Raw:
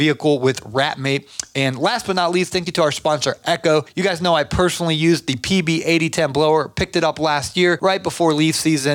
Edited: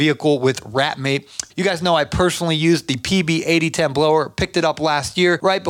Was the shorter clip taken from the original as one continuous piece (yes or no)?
no